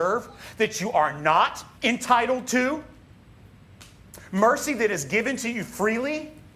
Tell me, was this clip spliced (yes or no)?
yes